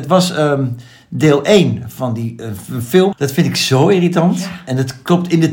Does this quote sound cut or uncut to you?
cut